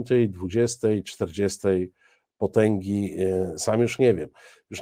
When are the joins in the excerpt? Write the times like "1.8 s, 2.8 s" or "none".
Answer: none